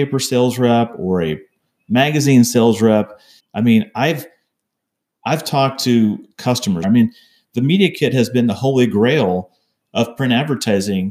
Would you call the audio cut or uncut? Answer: cut